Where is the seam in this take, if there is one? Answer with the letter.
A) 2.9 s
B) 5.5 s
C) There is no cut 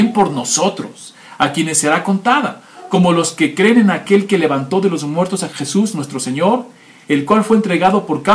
B